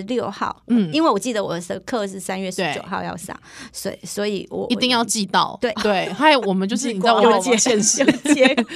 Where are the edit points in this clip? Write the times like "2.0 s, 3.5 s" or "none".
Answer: 5.7 s